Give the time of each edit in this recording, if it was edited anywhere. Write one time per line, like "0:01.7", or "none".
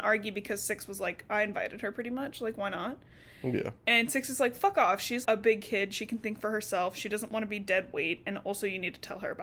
0:05.2